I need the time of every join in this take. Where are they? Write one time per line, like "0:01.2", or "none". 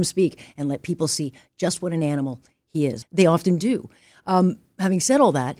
0:03.0